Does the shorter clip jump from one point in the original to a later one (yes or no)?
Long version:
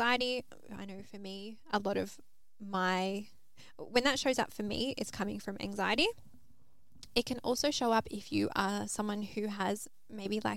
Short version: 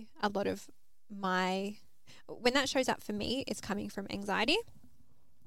no